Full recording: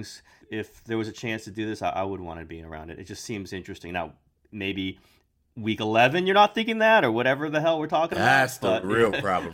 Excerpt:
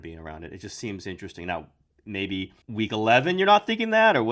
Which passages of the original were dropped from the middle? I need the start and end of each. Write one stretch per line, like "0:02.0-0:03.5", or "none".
0:05.1-0:05.5